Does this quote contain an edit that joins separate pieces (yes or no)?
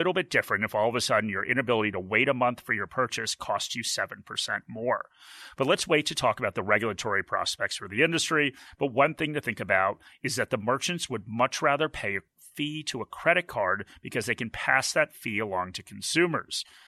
no